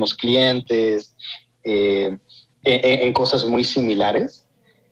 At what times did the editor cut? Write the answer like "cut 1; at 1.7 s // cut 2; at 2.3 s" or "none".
none